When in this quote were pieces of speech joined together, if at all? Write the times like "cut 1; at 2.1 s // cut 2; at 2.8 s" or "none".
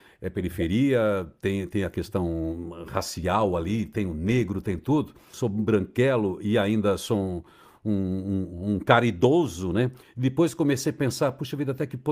cut 1; at 5.3 s // cut 2; at 10.0 s

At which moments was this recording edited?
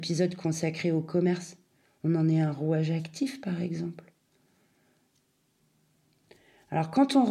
none

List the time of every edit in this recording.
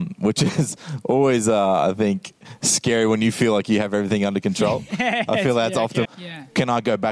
cut 1; at 6.0 s

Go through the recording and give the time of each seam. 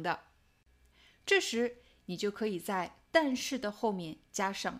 cut 1; at 1.1 s

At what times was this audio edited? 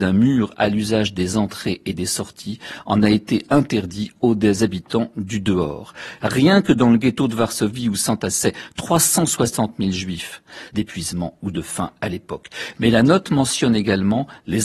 cut 1; at 6.2 s // cut 2; at 10.7 s

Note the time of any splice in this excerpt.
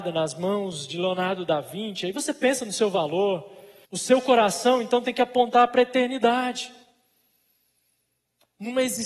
cut 1; at 3.8 s

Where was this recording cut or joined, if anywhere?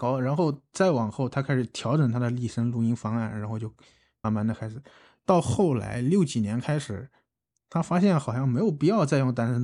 cut 1; at 4.2 s

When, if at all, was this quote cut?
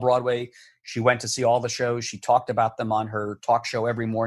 none

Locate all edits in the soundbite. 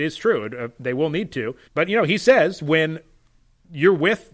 cut 1; at 1.6 s

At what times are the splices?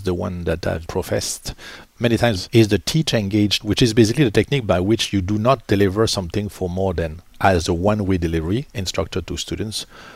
cut 1; at 3.6 s

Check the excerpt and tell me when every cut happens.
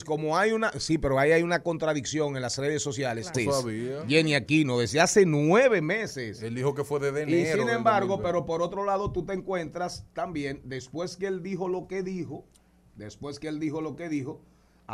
cut 1; at 3.3 s

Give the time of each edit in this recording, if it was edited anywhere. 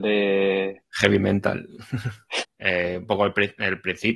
cut 1; at 2.4 s

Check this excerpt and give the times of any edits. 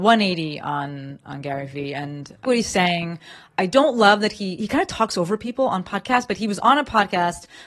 cut 1; at 2.4 s

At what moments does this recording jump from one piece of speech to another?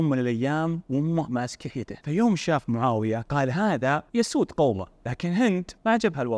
cut 1; at 2.0 s

